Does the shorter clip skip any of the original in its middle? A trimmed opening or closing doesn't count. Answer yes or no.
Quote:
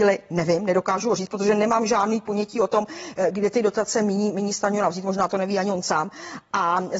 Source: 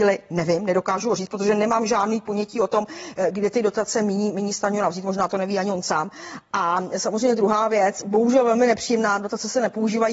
no